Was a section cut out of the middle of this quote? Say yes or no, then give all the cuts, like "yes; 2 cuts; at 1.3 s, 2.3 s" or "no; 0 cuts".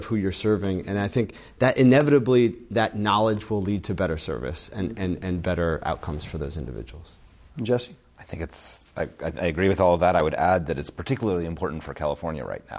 no; 0 cuts